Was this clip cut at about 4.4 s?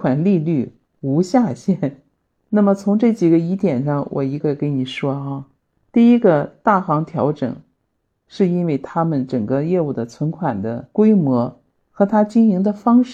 yes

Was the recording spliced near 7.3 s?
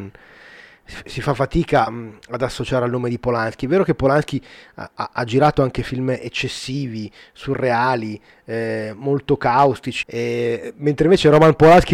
no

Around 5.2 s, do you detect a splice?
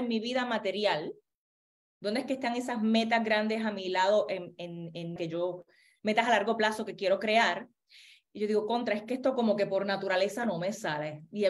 yes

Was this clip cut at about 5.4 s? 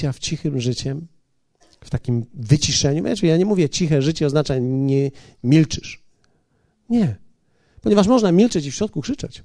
yes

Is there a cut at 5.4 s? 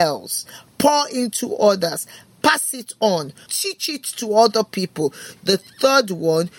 yes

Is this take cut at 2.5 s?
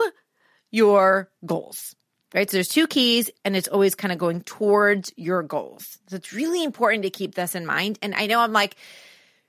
no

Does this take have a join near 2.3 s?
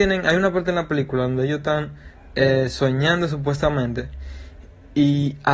no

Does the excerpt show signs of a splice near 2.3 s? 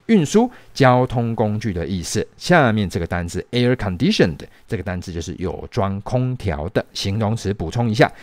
no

